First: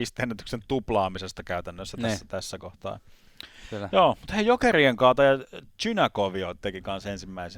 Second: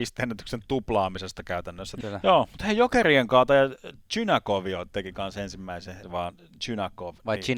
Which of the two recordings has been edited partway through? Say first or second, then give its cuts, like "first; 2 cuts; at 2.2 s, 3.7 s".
second; 2 cuts; at 2.0 s, 6.0 s